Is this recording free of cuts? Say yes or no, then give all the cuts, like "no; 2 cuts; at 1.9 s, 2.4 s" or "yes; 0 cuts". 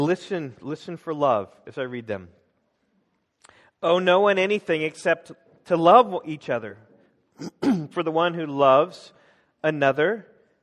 yes; 0 cuts